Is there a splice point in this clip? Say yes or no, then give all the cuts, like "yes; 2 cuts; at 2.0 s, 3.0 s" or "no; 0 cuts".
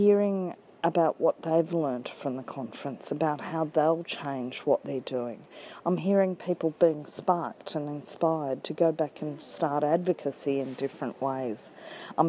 no; 0 cuts